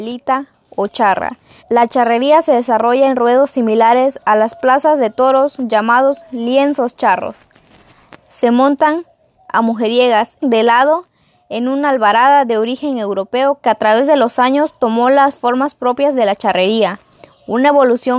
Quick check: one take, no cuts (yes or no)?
no